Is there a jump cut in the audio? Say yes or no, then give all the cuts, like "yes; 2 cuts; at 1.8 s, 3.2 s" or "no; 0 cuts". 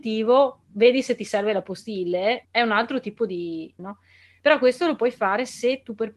yes; 2 cuts; at 2.4 s, 3.8 s